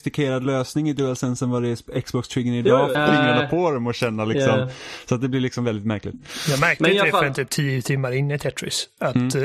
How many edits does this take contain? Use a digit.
1